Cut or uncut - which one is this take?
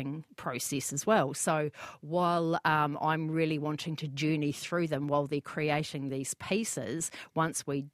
uncut